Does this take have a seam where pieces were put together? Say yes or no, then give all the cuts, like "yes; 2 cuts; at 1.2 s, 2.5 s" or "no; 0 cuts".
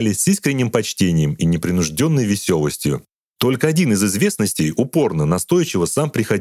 no; 0 cuts